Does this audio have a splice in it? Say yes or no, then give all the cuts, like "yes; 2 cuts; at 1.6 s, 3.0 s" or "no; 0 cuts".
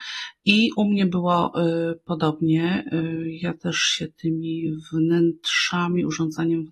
no; 0 cuts